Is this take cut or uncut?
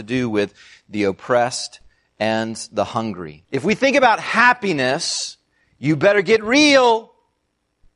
cut